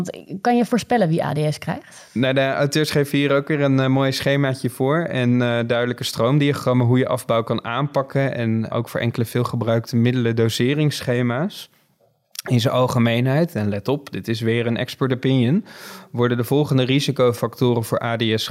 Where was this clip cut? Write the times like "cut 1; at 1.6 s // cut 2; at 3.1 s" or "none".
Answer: cut 1; at 8.7 s